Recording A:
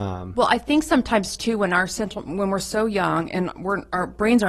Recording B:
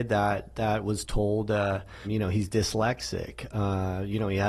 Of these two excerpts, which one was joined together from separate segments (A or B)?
B